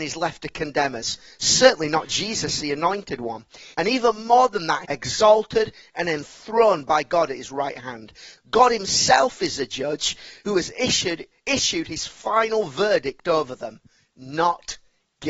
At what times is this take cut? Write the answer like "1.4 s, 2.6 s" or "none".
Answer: 3.7 s, 4.8 s, 8.4 s